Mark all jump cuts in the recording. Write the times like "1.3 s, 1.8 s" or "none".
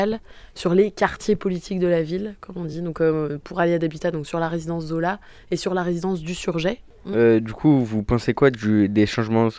none